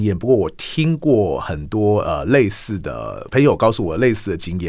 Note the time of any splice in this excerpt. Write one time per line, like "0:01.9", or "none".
0:03.3